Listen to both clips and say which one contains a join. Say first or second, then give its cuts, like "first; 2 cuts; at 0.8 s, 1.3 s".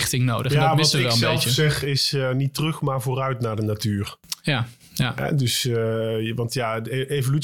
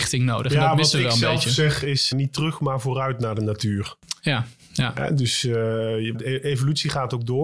second; 2 cuts; at 2.1 s, 6.1 s